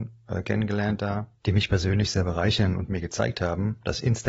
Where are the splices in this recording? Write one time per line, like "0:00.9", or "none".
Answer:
0:01.4